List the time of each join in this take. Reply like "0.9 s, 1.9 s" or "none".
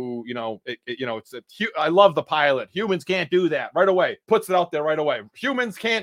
4.2 s